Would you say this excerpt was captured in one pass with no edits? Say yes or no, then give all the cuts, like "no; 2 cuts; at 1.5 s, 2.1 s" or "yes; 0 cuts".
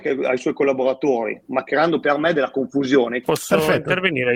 no; 1 cut; at 3.2 s